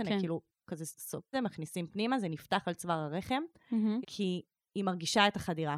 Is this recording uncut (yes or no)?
no